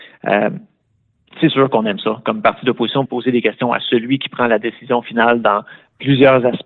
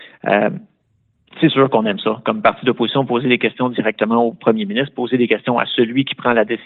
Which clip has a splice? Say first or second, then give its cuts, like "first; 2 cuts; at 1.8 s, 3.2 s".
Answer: first; 1 cut; at 3.1 s